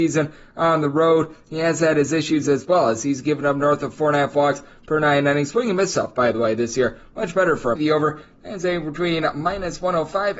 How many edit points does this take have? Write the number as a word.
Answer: one